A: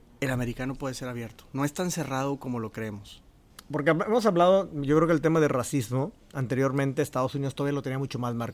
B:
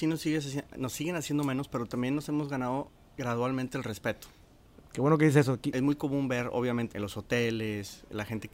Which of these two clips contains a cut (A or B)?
B